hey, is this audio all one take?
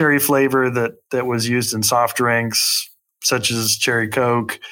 yes; 0 cuts

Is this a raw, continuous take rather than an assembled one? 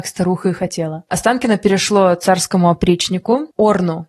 yes; 0 cuts

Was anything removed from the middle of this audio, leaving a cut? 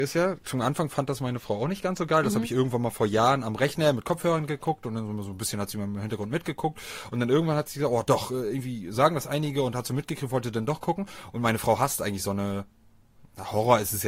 no; 0 cuts

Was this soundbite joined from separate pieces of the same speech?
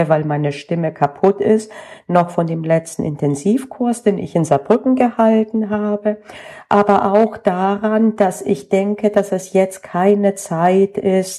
no; 0 cuts

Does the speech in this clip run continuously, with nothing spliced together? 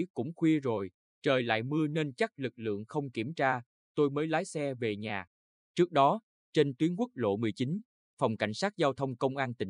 no; 1 cut; at 5.7 s

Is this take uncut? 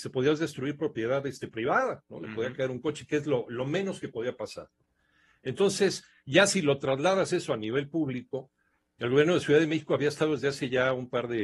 yes; 0 cuts

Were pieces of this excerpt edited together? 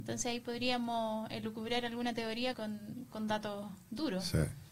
yes; 1 cut; at 2.5 s

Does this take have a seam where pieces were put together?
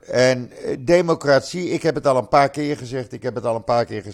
no; 0 cuts

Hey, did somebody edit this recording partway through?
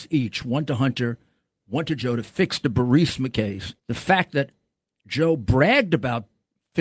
yes; 1 cut; at 3.8 s

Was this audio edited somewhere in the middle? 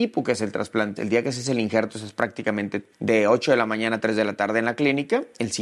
yes; 2 cuts; at 1.0 s, 2.9 s

